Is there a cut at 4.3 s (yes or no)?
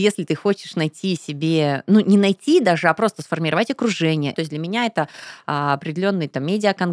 yes